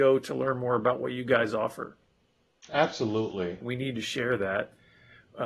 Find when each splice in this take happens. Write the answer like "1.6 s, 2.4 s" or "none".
3.6 s